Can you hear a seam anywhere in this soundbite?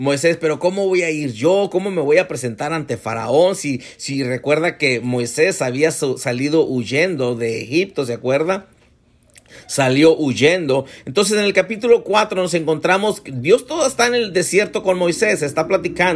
no; 0 cuts

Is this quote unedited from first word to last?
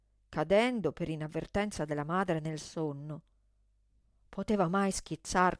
yes; 0 cuts

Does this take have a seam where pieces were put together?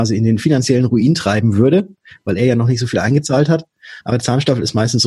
yes; 1 cut; at 4.0 s

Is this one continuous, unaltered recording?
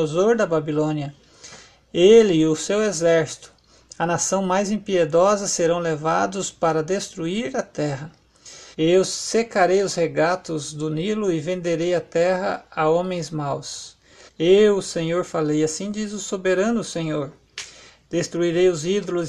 no; 2 cuts; at 8.7 s, 14.3 s

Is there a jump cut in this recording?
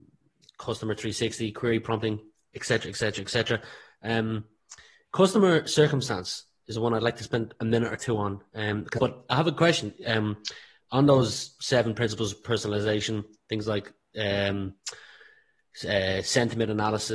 yes; 1 cut; at 9.0 s

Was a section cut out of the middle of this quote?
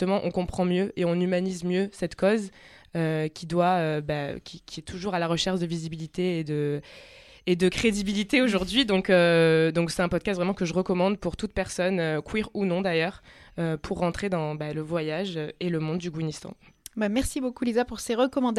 no; 0 cuts

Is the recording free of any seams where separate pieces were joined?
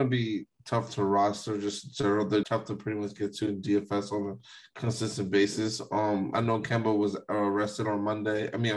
no; 1 cut; at 2.4 s

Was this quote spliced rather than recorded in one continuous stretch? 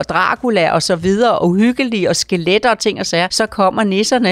yes; 1 cut; at 3.3 s

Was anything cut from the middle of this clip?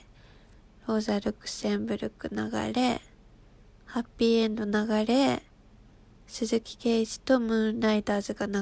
no; 0 cuts

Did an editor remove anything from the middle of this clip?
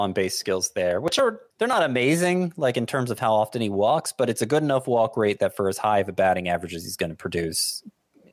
yes; 1 cut; at 1.5 s

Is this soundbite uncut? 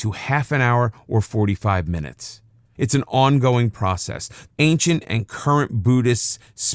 no; 2 cuts; at 2.7 s, 4.5 s

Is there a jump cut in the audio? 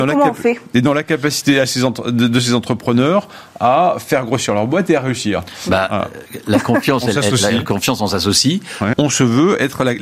yes; 1 cut; at 8.9 s

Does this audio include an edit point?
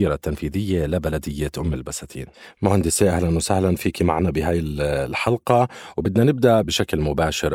yes; 1 cut; at 6.6 s

